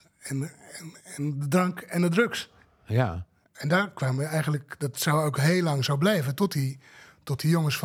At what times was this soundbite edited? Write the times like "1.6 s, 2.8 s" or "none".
3.4 s